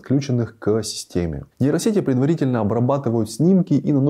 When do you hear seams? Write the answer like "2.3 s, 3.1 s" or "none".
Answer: 1.5 s

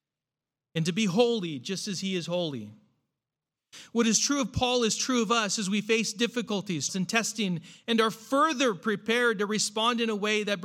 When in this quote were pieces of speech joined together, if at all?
6.9 s

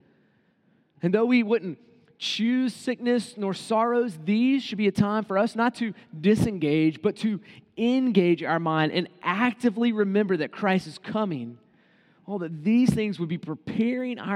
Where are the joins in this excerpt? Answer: none

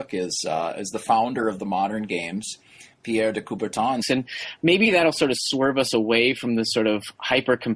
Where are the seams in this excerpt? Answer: 4.0 s

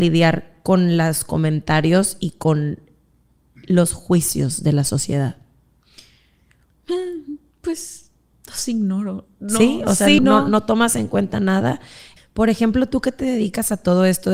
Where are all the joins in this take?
10.2 s, 12.2 s

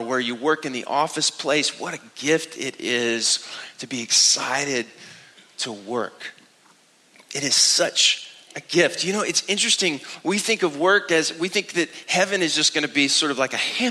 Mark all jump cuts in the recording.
none

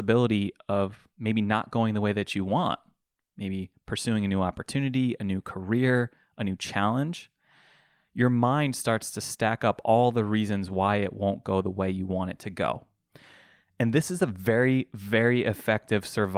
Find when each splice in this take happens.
none

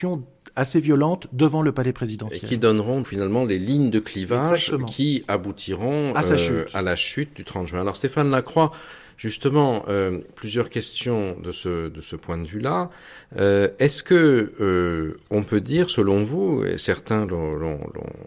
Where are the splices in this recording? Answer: 3.0 s

